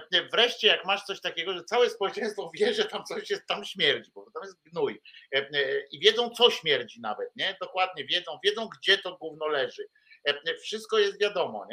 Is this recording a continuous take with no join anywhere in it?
yes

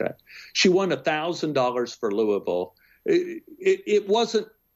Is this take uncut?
yes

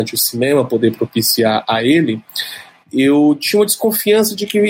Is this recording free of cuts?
yes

